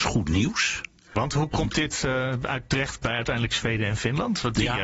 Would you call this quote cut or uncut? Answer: uncut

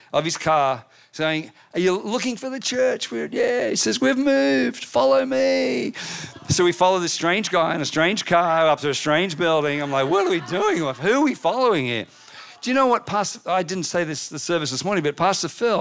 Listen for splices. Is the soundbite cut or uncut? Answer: uncut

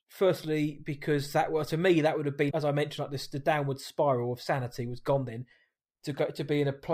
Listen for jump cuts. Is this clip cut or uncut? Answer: cut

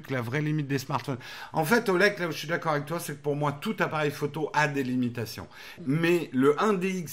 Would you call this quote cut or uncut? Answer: cut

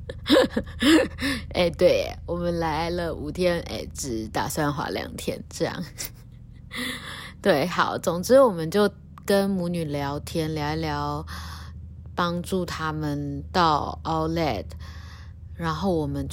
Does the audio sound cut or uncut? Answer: uncut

